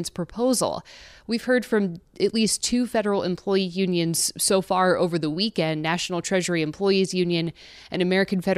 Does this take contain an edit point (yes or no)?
no